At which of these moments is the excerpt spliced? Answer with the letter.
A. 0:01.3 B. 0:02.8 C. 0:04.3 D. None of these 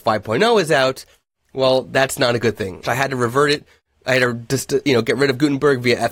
B